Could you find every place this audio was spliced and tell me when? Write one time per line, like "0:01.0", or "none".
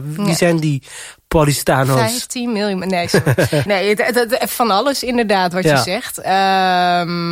0:03.7